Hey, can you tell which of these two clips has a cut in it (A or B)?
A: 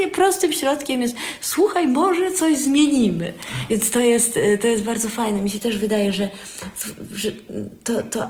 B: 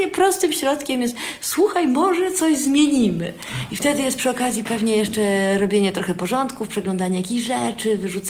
A